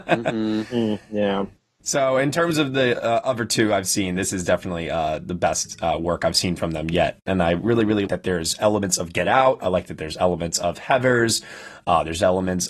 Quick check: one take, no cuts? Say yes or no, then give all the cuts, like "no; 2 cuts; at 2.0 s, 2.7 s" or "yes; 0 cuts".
no; 1 cut; at 8.1 s